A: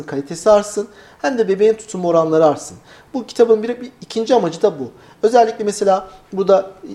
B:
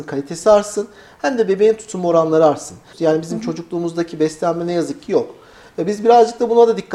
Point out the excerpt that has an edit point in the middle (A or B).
B